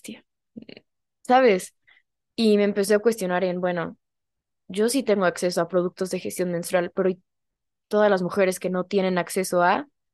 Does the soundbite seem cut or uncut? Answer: uncut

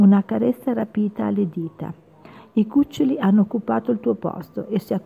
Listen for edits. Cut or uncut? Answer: cut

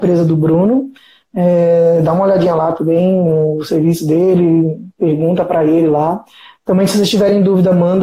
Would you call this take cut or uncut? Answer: uncut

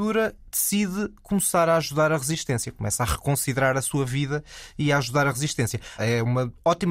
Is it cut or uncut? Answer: cut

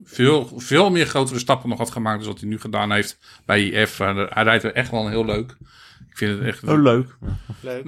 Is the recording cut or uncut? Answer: uncut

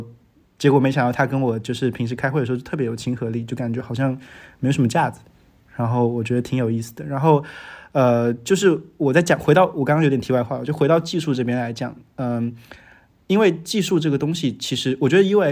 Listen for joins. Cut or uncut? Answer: uncut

